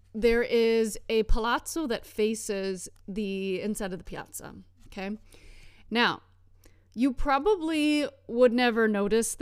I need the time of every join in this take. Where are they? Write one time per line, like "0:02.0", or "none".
0:05.9